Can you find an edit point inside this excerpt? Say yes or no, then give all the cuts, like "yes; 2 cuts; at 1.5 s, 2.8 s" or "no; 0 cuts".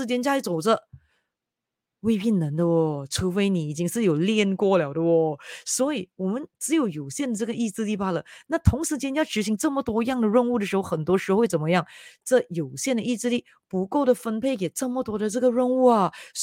no; 0 cuts